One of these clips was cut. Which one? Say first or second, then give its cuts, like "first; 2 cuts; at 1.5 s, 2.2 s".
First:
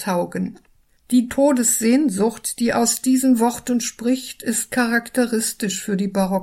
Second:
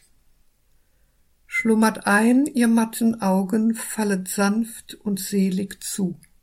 first; 1 cut; at 1.0 s